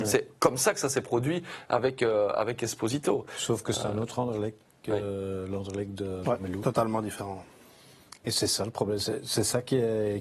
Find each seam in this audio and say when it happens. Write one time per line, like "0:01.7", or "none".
none

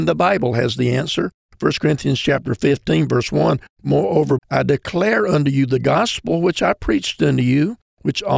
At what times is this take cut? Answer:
0:04.4

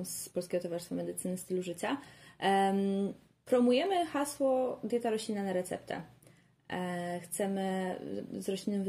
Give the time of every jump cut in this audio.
none

